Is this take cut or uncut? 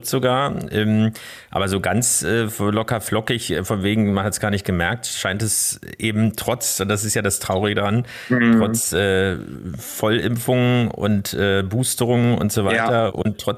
uncut